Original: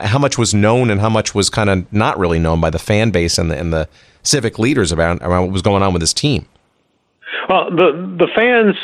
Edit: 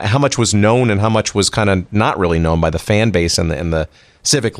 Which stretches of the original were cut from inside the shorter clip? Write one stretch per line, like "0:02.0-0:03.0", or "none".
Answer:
none